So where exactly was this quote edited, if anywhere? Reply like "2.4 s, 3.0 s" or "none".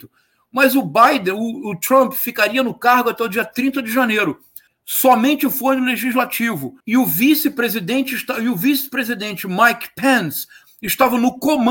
4.7 s, 6.8 s